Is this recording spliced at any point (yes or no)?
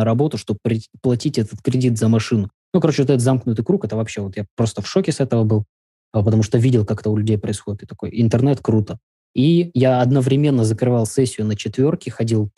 no